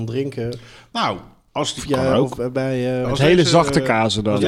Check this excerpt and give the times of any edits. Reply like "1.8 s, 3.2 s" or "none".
1.8 s, 3.0 s